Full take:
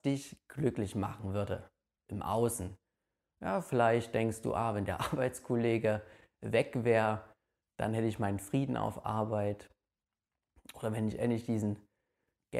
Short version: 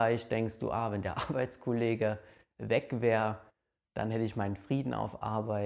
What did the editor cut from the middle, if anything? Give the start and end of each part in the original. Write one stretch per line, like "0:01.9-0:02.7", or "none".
none